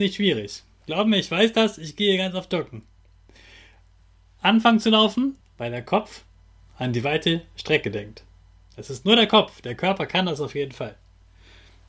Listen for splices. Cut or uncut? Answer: cut